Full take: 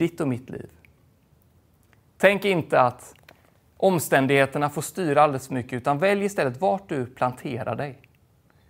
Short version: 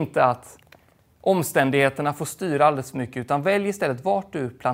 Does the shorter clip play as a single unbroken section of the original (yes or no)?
yes